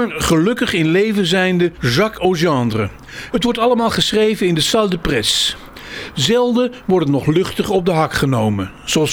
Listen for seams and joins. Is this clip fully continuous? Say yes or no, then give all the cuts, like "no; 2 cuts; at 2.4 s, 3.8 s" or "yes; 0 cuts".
no; 1 cut; at 3.3 s